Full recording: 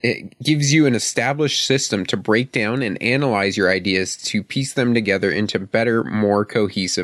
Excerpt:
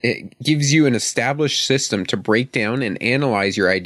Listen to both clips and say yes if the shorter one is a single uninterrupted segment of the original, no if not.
yes